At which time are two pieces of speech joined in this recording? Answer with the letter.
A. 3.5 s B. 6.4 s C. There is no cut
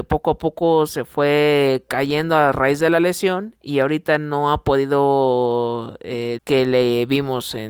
B